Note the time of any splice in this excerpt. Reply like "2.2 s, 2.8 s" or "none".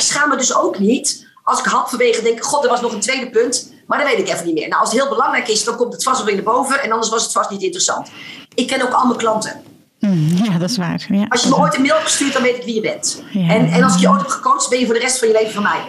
8.4 s